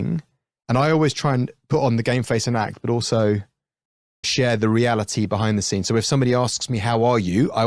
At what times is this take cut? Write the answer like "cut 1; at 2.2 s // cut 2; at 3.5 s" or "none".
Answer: cut 1; at 4.2 s